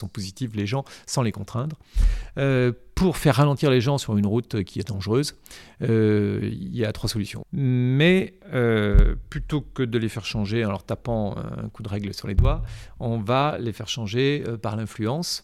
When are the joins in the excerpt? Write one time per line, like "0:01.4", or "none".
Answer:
0:07.4